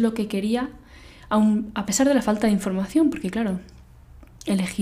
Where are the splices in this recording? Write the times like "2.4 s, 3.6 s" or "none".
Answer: none